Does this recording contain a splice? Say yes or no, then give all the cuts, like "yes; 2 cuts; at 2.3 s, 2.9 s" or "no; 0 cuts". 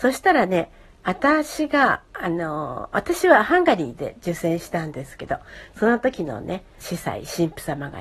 yes; 1 cut; at 6.8 s